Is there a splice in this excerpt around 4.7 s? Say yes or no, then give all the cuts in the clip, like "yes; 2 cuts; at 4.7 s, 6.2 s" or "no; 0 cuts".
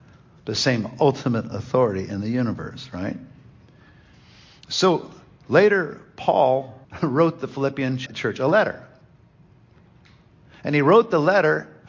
no; 2 cuts; at 6.8 s, 8.1 s